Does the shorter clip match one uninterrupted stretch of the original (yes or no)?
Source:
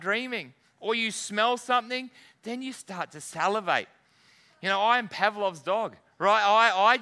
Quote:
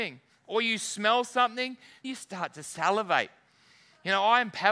no